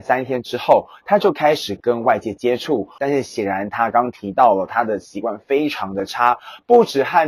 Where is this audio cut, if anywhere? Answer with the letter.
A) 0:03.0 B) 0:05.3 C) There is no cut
A